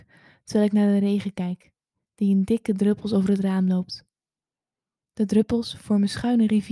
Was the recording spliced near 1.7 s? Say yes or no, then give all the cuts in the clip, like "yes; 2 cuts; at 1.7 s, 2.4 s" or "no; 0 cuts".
no; 0 cuts